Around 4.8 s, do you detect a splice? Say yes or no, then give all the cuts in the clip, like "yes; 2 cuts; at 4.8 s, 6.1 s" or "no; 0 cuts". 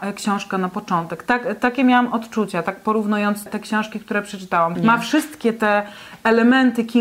yes; 2 cuts; at 3.5 s, 4.8 s